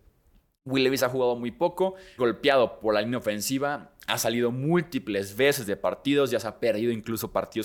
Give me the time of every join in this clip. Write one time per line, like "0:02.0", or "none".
0:02.2